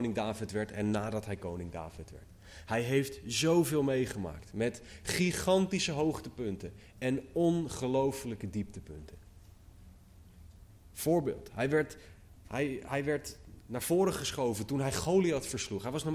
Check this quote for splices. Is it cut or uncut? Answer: uncut